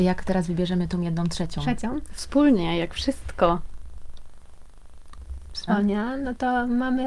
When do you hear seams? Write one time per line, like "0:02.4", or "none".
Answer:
0:05.7